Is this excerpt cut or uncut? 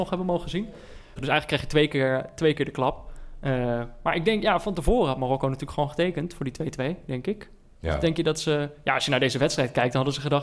cut